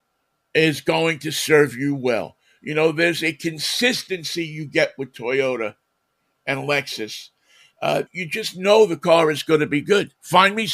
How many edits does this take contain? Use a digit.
1